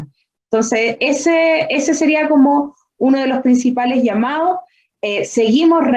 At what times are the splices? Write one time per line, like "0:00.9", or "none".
none